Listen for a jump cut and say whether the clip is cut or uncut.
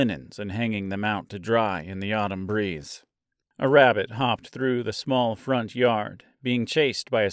cut